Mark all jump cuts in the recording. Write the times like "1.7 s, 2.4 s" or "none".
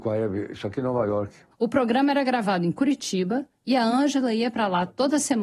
1.5 s